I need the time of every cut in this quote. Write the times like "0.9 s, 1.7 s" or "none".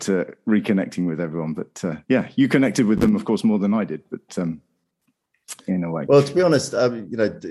2.0 s